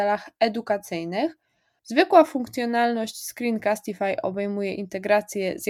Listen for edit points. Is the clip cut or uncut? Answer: cut